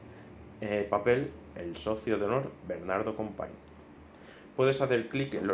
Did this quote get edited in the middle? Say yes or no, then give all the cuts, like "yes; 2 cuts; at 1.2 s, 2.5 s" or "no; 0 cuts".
no; 0 cuts